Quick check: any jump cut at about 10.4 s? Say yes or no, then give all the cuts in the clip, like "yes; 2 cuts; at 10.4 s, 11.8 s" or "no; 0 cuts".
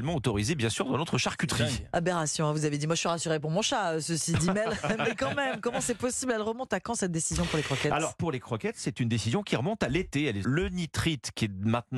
yes; 1 cut; at 10.4 s